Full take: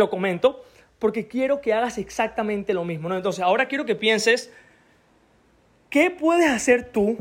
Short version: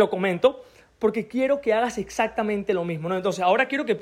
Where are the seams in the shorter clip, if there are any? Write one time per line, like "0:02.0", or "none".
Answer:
none